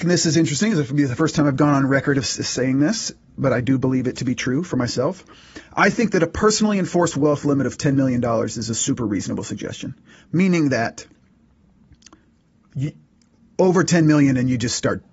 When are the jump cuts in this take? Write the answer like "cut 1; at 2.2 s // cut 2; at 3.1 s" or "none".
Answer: none